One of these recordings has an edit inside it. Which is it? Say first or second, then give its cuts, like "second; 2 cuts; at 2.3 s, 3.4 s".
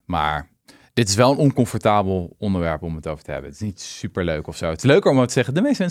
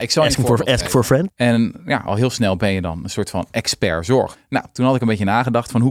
second; 2 cuts; at 1.3 s, 4.3 s